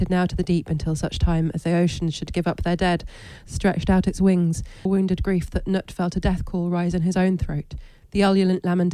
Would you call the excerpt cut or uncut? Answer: cut